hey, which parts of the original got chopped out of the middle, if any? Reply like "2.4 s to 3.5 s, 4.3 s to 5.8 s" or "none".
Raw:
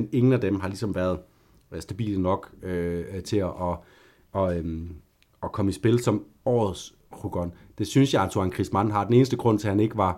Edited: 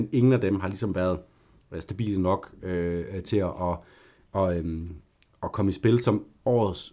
none